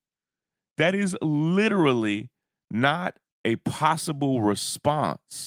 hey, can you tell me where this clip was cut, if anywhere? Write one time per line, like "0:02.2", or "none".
0:03.3